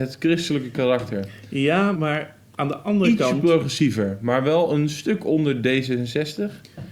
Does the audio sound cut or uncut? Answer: cut